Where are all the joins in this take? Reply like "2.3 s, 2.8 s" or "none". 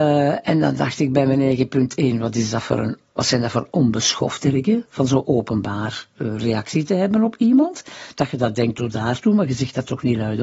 none